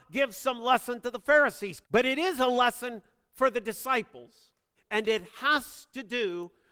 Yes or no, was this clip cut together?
yes